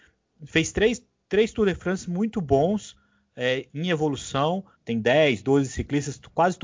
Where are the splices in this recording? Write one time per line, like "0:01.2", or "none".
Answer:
0:04.7